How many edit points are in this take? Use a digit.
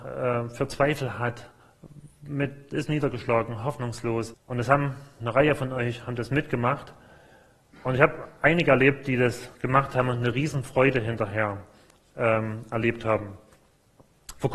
1